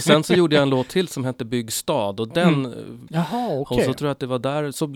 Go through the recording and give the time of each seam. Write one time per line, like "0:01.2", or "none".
0:03.1